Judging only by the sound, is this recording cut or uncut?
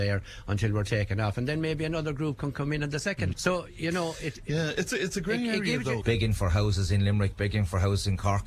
cut